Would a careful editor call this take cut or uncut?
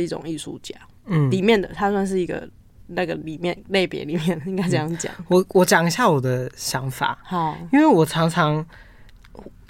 uncut